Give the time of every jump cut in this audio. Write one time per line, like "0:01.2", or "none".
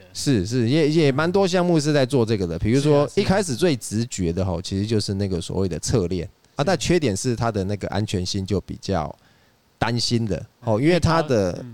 0:06.6